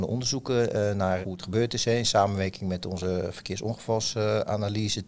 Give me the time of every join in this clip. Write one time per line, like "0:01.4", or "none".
0:01.2